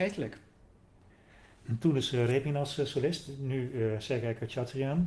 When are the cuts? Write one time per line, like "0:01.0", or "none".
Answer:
none